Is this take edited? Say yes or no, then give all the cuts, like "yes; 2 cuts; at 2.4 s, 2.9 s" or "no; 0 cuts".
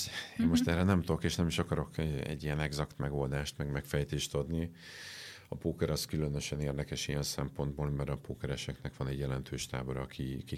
no; 0 cuts